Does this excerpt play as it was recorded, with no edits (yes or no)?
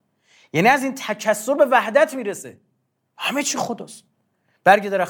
yes